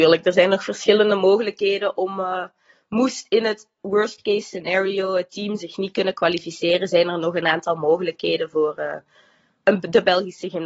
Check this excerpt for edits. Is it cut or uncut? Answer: uncut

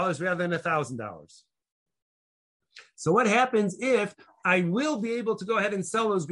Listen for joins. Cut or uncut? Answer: uncut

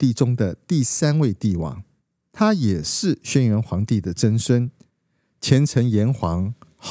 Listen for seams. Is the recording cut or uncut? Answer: uncut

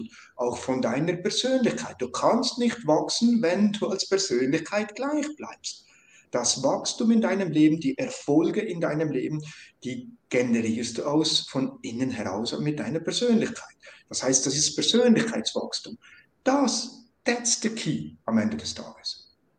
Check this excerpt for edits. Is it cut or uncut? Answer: uncut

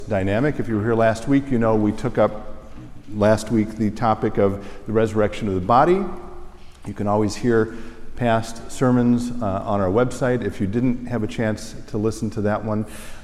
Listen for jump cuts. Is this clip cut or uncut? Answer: uncut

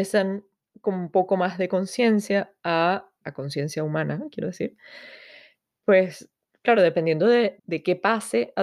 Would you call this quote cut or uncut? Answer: cut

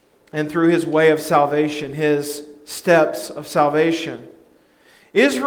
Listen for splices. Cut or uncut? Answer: uncut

